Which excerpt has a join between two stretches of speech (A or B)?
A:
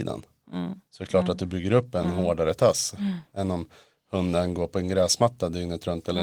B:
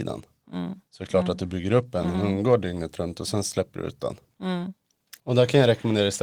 B